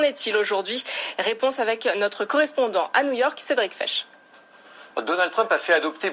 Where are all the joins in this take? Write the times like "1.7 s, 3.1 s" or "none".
4.9 s